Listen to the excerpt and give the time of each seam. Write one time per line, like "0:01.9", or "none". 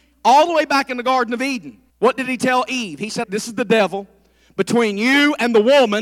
0:01.9
0:03.2